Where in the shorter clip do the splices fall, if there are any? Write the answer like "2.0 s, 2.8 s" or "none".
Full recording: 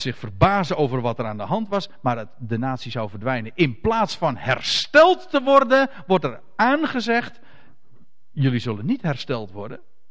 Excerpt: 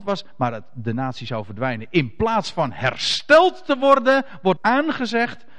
4.6 s